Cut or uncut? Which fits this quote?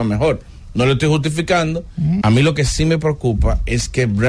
cut